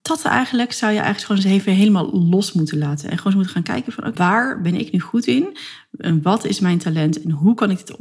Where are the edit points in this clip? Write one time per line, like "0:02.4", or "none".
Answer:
0:04.2